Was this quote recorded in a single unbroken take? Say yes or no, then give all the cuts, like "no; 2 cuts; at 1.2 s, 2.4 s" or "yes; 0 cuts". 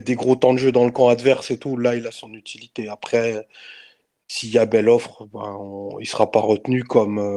yes; 0 cuts